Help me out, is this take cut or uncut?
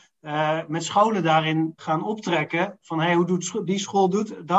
cut